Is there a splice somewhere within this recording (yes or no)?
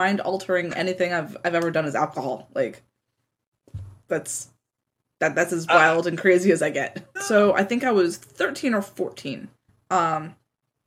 yes